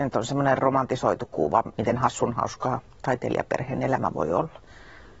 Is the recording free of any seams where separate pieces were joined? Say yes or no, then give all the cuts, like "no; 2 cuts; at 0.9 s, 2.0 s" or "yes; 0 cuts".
no; 1 cut; at 1.8 s